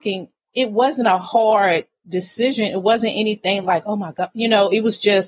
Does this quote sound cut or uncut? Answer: uncut